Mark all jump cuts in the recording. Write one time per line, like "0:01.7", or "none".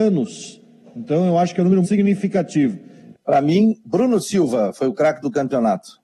0:01.8
0:03.1